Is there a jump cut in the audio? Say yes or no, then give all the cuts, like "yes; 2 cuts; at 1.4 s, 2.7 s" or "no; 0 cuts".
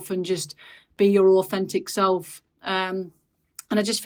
no; 0 cuts